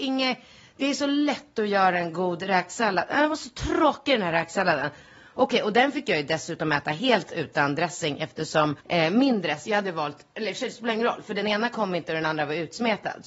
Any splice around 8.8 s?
yes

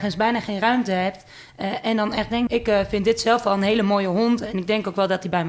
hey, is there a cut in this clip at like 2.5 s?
yes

